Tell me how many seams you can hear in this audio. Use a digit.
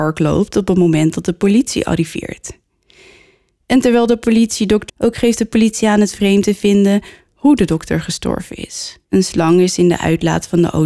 2